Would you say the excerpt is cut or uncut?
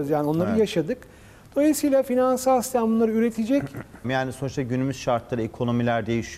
cut